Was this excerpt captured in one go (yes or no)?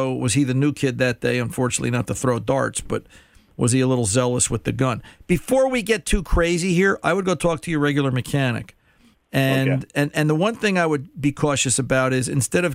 yes